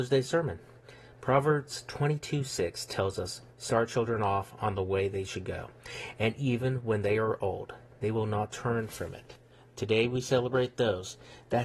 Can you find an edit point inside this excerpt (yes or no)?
no